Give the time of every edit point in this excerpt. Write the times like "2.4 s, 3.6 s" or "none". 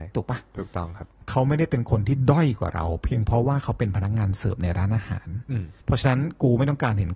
5.8 s